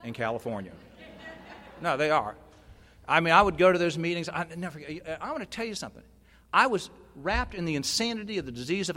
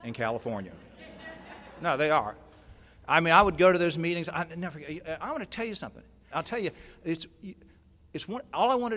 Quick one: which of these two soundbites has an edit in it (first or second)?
second